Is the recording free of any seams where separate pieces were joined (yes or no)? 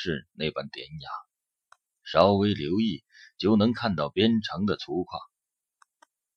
yes